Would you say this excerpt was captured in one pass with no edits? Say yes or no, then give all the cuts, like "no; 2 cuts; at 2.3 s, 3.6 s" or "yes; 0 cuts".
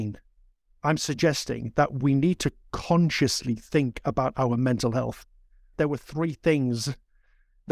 no; 1 cut; at 5.7 s